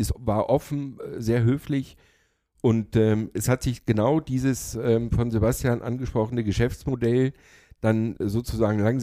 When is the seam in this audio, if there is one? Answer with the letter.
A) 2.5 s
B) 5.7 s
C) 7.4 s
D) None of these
D